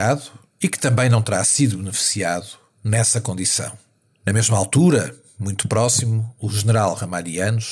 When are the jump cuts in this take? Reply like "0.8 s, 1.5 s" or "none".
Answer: 4.0 s